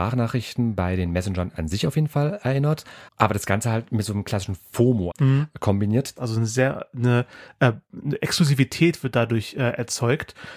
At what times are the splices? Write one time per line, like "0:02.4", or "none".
0:03.1
0:05.1
0:06.2